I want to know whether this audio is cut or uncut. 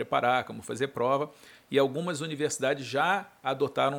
uncut